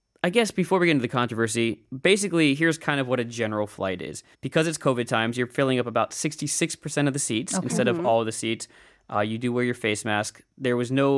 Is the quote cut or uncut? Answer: cut